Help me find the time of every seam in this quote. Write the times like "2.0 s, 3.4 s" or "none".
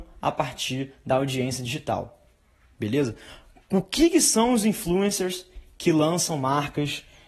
none